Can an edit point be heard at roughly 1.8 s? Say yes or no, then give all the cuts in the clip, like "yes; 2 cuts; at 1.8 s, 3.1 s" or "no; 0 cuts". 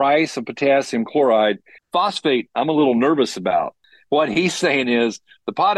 yes; 1 cut; at 1.8 s